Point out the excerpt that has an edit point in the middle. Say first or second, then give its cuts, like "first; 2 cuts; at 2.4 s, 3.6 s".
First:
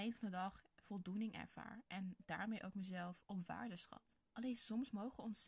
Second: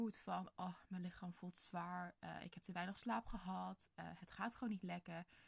first; 1 cut; at 4.3 s